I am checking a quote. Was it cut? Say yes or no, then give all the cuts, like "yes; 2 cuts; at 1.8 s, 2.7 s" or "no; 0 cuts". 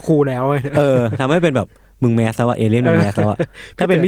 no; 0 cuts